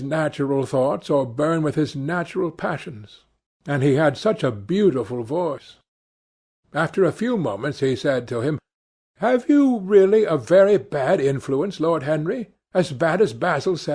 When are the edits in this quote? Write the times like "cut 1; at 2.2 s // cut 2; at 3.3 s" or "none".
cut 1; at 3.5 s

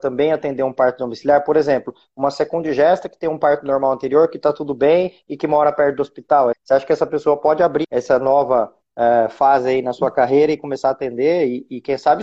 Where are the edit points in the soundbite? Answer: cut 1; at 6.5 s // cut 2; at 7.8 s

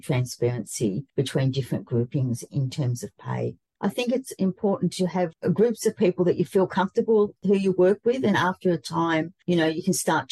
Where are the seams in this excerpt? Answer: cut 1; at 8.3 s

